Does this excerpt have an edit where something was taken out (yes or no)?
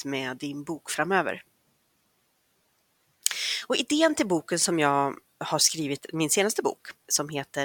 no